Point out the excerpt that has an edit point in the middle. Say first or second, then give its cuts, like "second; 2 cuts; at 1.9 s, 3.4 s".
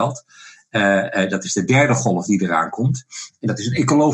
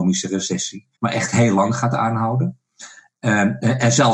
second; 1 cut; at 0.9 s